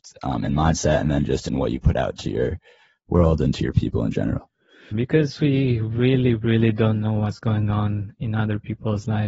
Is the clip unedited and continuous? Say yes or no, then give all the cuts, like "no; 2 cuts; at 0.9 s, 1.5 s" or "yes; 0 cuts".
no; 1 cut; at 4.9 s